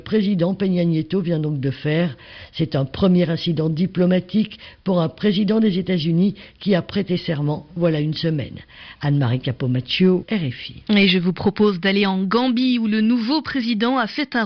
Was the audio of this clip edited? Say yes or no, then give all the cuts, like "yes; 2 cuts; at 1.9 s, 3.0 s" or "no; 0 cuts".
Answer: yes; 1 cut; at 10.2 s